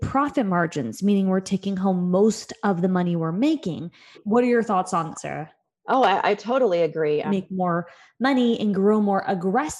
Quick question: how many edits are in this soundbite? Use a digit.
3